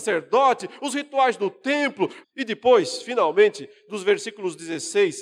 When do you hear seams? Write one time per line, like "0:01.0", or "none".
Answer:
0:02.2